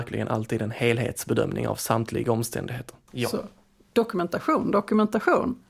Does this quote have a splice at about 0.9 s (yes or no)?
no